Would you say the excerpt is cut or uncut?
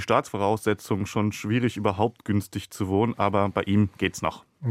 uncut